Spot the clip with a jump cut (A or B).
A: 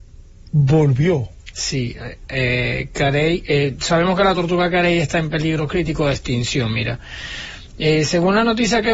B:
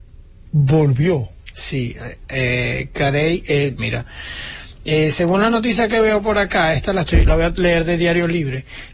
B